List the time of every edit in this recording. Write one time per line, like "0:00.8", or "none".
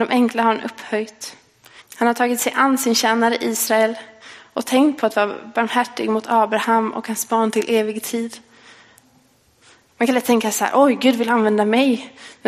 0:01.8
0:09.9